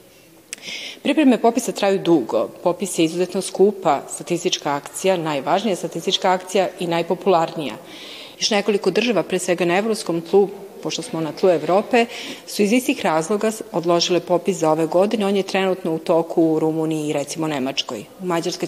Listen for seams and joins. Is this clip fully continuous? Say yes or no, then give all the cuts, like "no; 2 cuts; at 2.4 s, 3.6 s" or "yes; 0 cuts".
no; 1 cut; at 8.3 s